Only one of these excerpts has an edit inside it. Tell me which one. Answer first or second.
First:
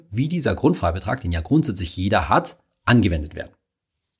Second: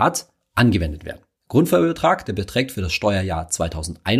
second